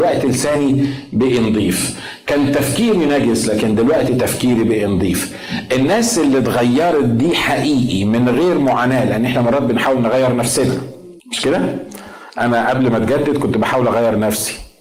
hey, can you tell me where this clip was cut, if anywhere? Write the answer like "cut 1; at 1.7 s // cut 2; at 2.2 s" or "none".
cut 1; at 11.2 s